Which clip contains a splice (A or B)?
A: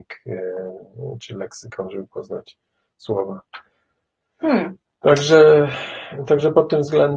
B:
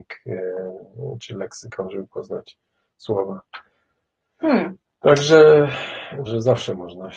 B